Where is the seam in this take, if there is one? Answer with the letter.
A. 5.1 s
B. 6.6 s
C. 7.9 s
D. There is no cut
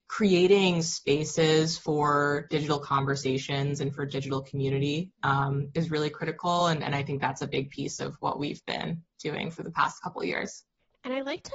D